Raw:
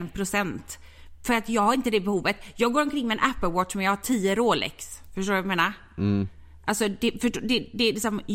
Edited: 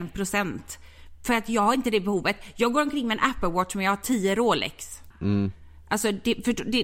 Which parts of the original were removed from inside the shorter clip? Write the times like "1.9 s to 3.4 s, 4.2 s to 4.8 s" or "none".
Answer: 5.1 s to 5.9 s